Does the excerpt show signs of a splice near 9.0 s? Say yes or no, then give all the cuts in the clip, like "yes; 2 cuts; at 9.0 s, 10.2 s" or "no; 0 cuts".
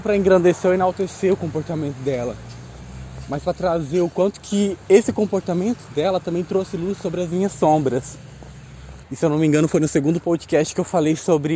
yes; 1 cut; at 9.0 s